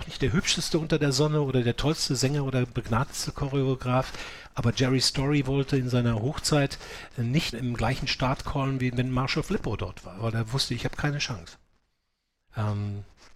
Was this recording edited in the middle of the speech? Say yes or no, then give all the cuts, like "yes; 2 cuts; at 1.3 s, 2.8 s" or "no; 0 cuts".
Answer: yes; 1 cut; at 7.5 s